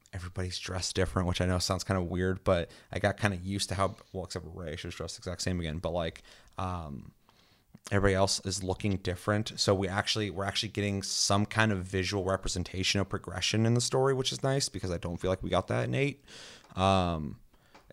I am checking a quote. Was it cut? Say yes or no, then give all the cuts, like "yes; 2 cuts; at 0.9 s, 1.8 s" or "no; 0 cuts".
no; 0 cuts